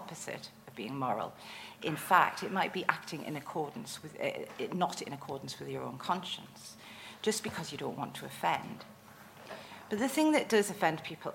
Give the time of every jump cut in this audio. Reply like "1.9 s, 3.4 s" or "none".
none